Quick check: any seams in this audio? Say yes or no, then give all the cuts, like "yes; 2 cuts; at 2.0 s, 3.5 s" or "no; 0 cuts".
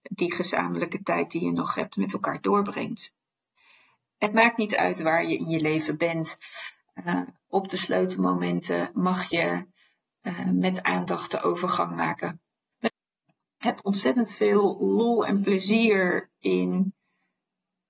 yes; 1 cut; at 12.7 s